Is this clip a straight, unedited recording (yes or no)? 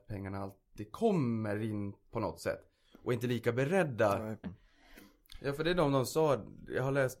no